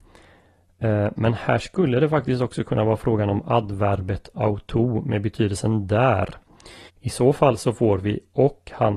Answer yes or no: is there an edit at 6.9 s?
yes